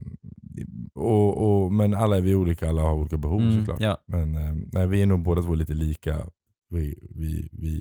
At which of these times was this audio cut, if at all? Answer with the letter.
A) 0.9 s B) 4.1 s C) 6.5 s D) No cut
D